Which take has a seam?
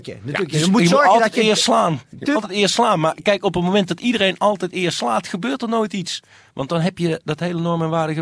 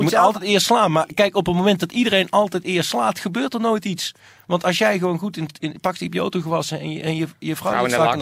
first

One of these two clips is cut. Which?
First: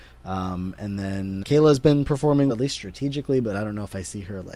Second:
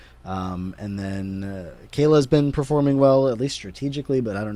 first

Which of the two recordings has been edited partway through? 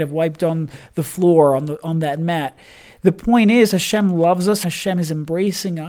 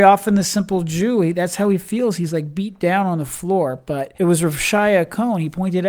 first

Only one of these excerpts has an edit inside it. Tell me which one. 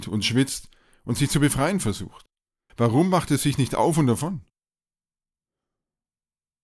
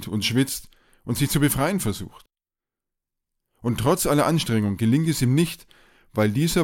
first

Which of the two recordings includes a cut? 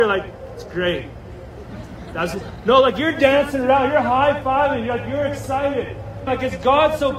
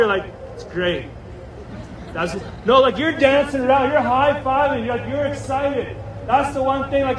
first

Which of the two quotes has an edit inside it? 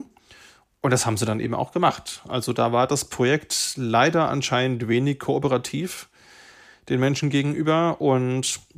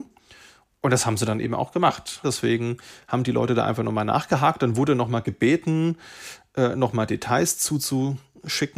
second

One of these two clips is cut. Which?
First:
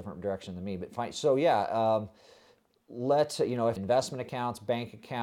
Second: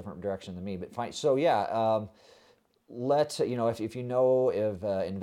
first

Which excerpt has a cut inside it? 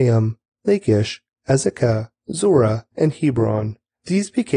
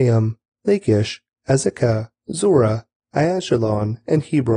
first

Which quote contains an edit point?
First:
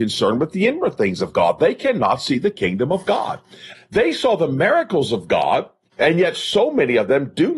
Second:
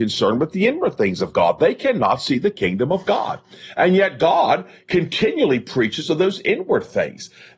first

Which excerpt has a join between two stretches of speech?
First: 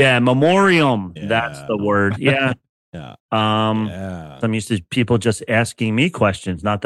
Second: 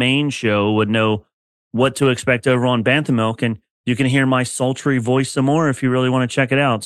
first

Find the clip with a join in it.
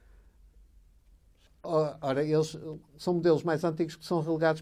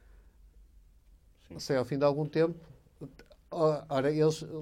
first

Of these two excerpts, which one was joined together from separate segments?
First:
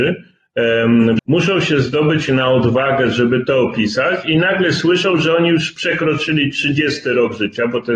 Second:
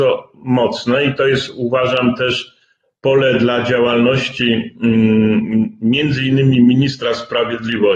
first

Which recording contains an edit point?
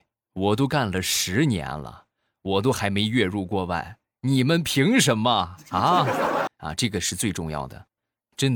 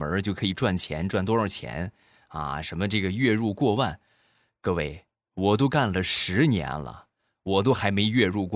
first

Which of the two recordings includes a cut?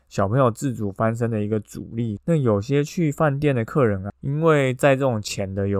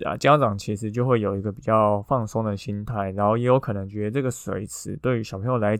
first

